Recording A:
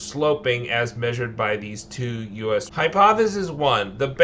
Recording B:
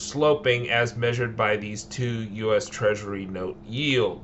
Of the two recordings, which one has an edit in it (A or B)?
A